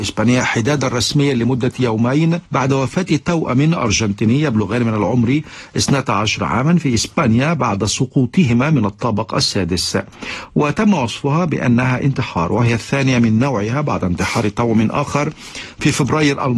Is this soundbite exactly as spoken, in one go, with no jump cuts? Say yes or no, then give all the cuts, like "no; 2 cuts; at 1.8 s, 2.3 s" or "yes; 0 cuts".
no; 1 cut; at 2.5 s